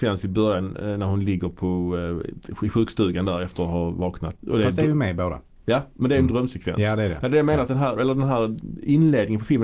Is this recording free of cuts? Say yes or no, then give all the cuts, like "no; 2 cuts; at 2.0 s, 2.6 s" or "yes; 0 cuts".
no; 2 cuts; at 4.3 s, 8.0 s